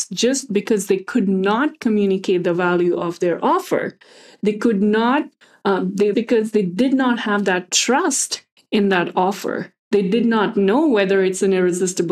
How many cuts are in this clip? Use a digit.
2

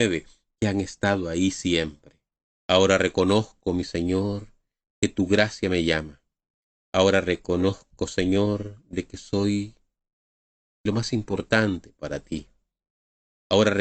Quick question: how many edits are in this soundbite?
1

